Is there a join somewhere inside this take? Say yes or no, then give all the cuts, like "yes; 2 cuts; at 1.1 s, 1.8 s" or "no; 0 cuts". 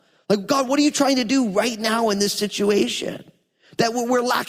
no; 0 cuts